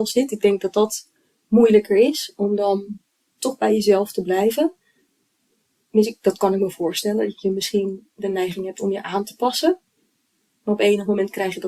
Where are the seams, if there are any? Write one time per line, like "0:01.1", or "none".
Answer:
none